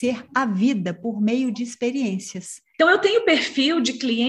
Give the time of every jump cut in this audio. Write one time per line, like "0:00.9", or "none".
0:02.7